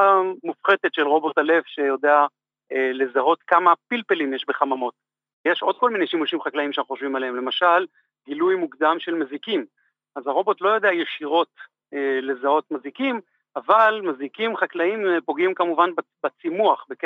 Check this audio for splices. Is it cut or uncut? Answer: cut